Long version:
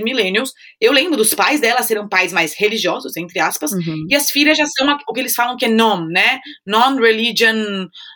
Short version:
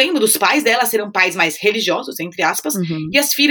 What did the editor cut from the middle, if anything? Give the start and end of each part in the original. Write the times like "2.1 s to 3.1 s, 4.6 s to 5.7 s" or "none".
none